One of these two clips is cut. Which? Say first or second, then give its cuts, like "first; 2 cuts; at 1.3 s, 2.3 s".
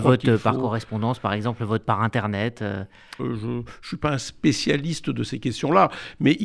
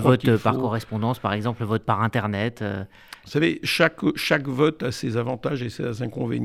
first; 1 cut; at 3.2 s